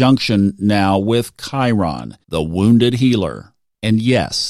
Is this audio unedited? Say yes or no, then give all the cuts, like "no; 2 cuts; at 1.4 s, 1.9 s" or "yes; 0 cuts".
no; 1 cut; at 2.2 s